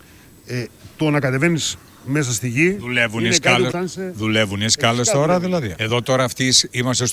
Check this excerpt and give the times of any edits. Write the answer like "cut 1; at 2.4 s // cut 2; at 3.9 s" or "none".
cut 1; at 3.7 s // cut 2; at 5.7 s